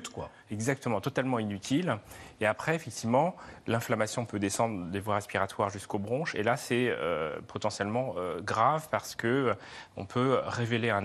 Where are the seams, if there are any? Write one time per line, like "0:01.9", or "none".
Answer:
none